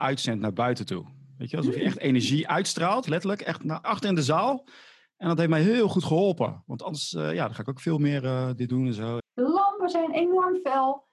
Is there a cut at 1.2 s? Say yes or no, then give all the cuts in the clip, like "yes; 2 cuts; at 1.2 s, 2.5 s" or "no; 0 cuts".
no; 2 cuts; at 3.8 s, 9.2 s